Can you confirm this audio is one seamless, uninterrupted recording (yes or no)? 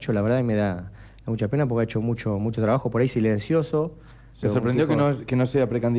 no